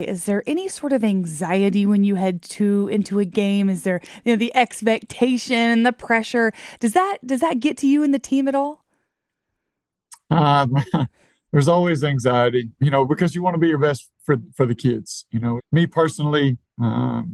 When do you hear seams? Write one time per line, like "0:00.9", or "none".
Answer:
0:12.8
0:15.6